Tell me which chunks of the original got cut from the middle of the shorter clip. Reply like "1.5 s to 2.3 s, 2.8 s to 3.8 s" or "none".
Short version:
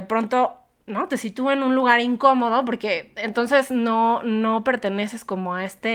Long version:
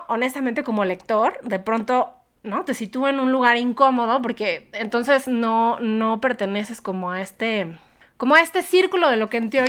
none